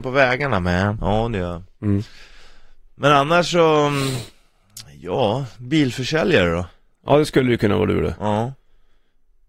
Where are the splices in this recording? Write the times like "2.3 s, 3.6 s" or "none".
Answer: 1.0 s